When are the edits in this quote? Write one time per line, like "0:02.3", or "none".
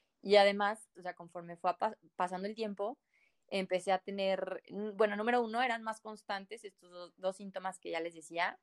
0:00.9